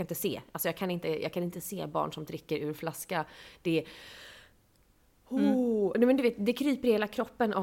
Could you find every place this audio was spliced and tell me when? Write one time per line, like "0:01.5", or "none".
none